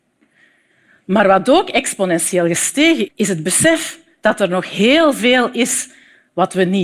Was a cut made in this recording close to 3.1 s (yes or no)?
yes